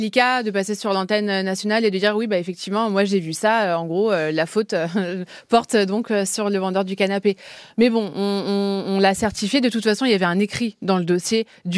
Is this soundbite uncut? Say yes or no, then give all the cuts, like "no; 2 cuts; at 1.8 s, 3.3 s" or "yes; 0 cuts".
yes; 0 cuts